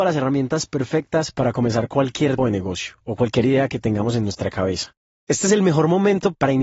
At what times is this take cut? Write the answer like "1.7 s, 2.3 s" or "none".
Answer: 2.4 s, 5.1 s